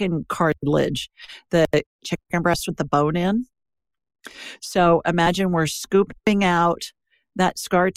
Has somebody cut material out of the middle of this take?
yes; 1 cut; at 1.9 s

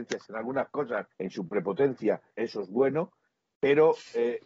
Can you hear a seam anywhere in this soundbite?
yes; 2 cuts; at 1.1 s, 2.3 s

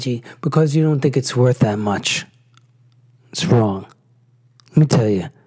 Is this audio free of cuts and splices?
yes; 0 cuts

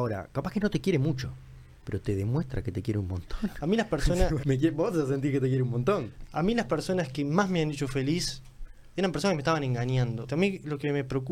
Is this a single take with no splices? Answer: no; 2 cuts; at 4.4 s, 10.3 s

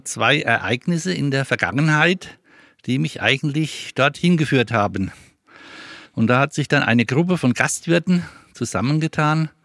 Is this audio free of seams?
no; 1 cut; at 6.1 s

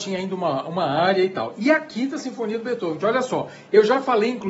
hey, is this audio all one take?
no; 1 cut; at 3.0 s

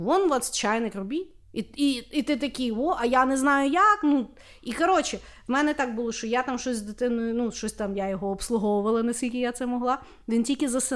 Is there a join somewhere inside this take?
yes; 1 cut; at 1.4 s

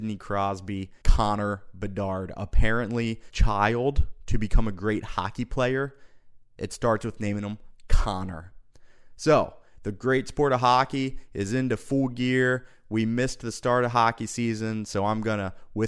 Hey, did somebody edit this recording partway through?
yes; 2 cuts; at 1.0 s, 3.3 s

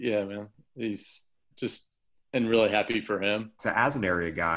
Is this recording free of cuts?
no; 2 cuts; at 1.5 s, 3.6 s

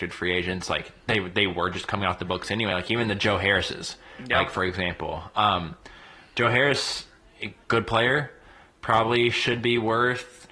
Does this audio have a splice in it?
no; 0 cuts

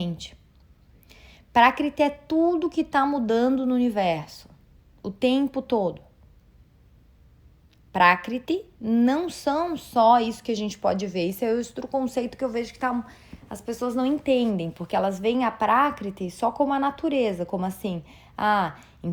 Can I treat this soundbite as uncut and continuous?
yes; 0 cuts

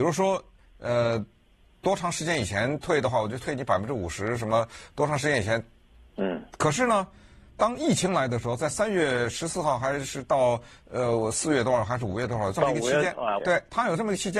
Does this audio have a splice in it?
yes; 2 cuts; at 6.1 s, 13.4 s

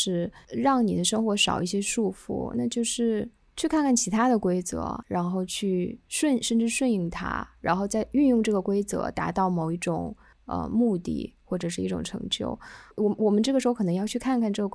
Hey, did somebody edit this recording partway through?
yes; 2 cuts; at 5.0 s, 12.9 s

